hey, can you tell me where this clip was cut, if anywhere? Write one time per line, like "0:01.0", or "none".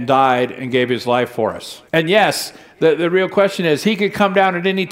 0:01.9